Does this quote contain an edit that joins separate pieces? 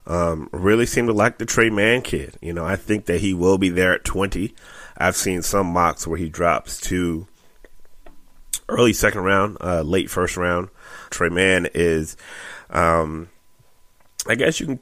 yes; 1 cut; at 11.1 s

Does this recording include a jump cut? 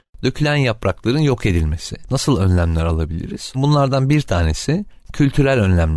yes; 2 cuts; at 2.1 s, 3.5 s

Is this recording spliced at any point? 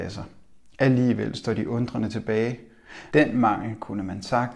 yes; 1 cut; at 3.1 s

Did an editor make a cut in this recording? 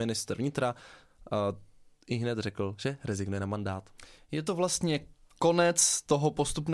no; 0 cuts

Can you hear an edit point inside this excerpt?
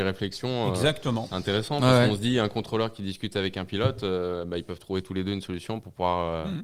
no; 0 cuts

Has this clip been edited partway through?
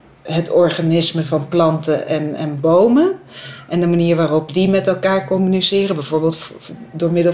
no; 0 cuts

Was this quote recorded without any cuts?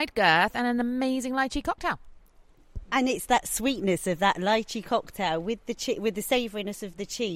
yes; 0 cuts

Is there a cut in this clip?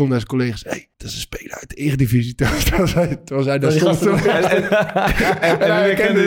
yes; 1 cut; at 0.9 s

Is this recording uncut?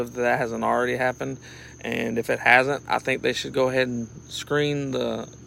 yes; 0 cuts

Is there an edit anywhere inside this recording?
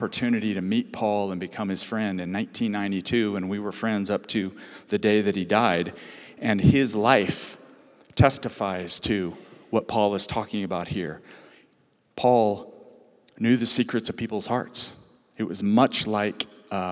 no; 0 cuts

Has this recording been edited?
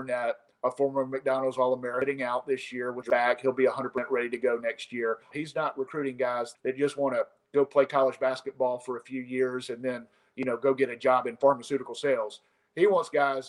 yes; 2 cuts; at 5.3 s, 6.5 s

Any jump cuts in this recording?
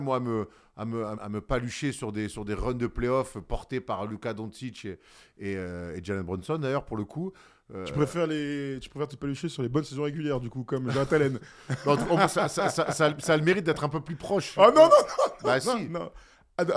yes; 1 cut; at 1.1 s

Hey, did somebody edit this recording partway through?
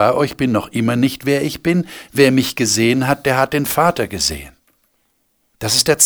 no; 0 cuts

